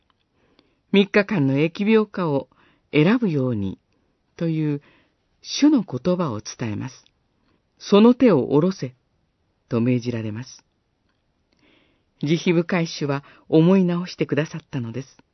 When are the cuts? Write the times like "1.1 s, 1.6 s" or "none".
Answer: 7.6 s